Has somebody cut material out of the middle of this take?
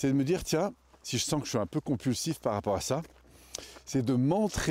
yes; 1 cut; at 1.0 s

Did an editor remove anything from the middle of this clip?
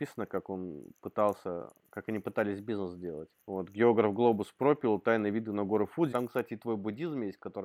yes; 2 cuts; at 3.4 s, 6.1 s

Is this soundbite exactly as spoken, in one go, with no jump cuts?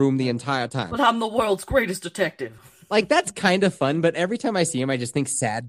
yes; 0 cuts

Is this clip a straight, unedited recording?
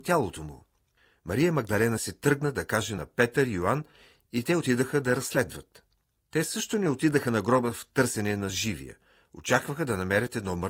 yes; 0 cuts

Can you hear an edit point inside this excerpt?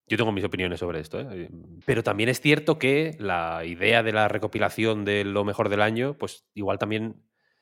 yes; 1 cut; at 1.8 s

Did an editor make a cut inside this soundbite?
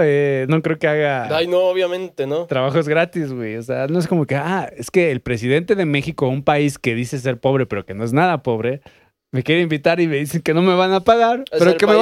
no; 0 cuts

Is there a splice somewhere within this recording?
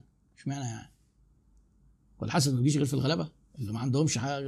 no; 0 cuts

